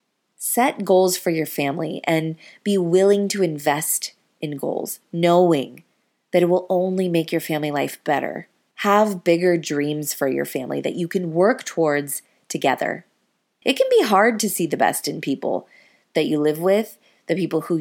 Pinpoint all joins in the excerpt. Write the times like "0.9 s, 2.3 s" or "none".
13.6 s